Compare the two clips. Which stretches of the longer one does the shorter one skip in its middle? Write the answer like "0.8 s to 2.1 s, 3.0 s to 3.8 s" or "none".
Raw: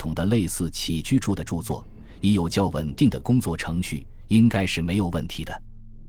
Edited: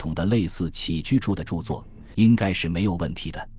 2.1 s to 4.3 s